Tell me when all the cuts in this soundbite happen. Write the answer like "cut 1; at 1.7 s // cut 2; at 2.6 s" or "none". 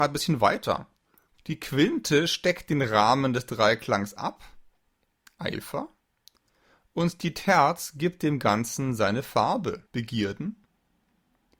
cut 1; at 1.4 s // cut 2; at 9.9 s